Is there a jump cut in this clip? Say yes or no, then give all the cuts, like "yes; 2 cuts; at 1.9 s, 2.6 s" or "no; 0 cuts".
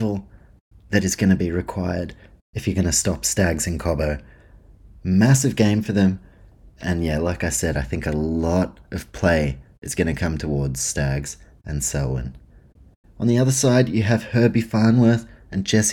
no; 0 cuts